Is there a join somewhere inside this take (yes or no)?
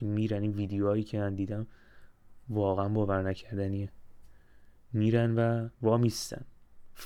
yes